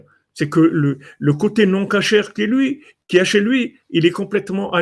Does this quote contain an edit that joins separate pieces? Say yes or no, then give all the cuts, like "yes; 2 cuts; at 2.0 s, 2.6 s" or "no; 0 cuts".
no; 0 cuts